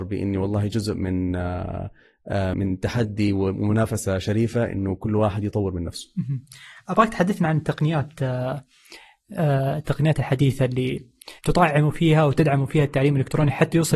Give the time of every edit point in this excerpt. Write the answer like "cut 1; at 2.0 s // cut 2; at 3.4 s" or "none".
cut 1; at 2.5 s // cut 2; at 11.4 s